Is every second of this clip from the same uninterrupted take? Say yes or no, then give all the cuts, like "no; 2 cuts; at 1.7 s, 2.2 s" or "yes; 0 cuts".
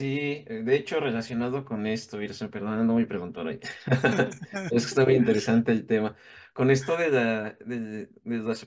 yes; 0 cuts